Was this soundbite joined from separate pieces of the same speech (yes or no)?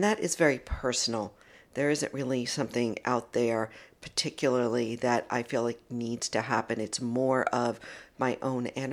no